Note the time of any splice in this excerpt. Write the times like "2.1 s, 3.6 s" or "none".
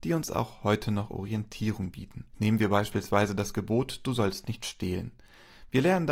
2.3 s

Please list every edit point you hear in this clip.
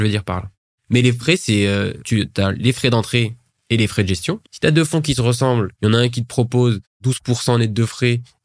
2.0 s, 4.4 s, 5.7 s

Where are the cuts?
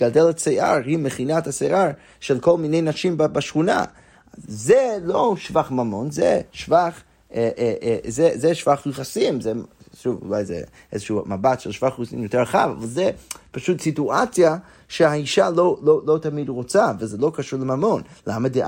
none

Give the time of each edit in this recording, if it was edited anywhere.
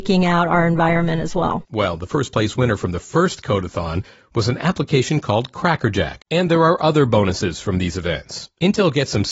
1.6 s, 6.2 s

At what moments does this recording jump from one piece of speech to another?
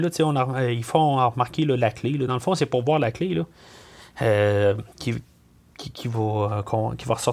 none

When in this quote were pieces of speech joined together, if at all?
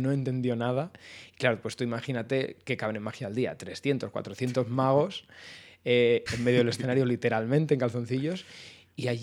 6.3 s

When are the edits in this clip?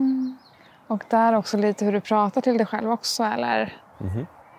none

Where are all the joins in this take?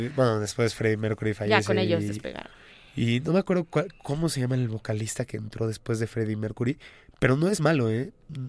none

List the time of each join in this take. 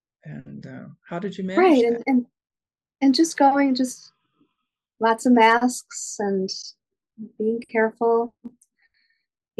none

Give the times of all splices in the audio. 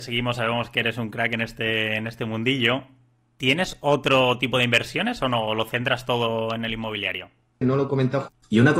7.6 s

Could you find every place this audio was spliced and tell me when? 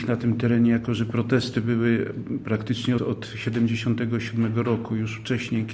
3.0 s

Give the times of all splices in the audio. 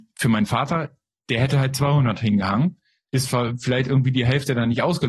none

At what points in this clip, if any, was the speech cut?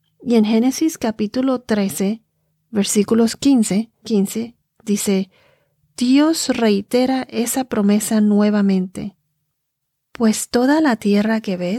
4.0 s

